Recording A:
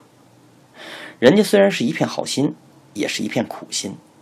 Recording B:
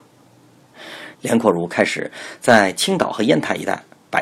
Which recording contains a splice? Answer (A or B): B